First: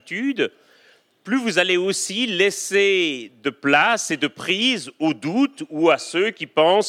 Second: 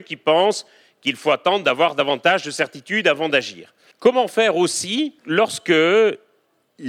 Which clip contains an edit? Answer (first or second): second